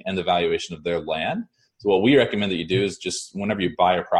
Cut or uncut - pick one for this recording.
uncut